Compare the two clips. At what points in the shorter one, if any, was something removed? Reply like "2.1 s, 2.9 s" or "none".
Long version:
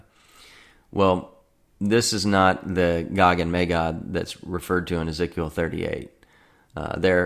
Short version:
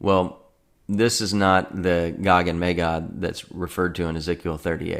none